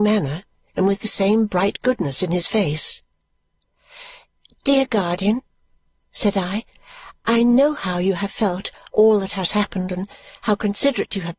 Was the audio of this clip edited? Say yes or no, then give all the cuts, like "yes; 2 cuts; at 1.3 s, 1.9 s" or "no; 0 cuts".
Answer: no; 0 cuts